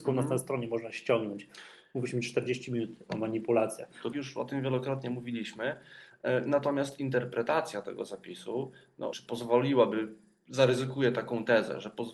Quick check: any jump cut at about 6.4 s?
no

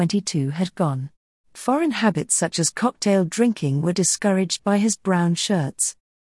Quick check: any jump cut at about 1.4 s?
yes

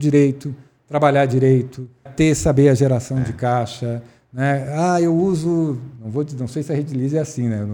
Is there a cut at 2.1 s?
yes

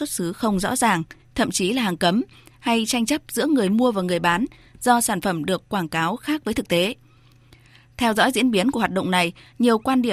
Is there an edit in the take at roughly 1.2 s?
yes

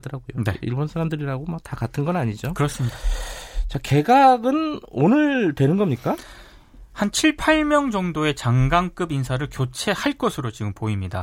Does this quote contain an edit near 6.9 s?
no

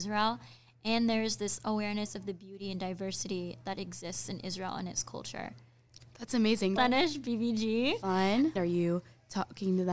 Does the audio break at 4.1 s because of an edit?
no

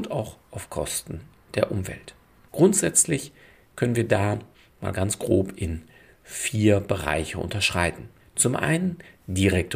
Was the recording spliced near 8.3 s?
no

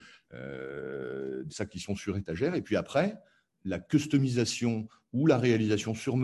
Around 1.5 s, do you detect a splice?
yes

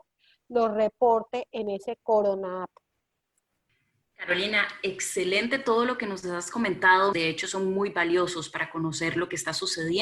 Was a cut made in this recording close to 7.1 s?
yes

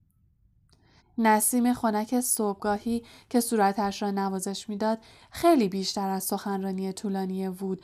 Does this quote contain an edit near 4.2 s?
no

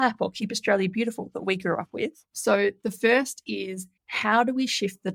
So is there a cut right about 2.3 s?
yes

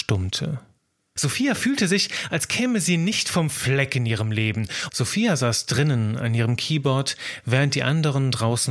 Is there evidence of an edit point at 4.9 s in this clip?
yes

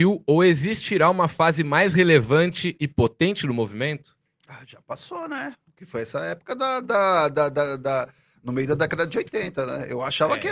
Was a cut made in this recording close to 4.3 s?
no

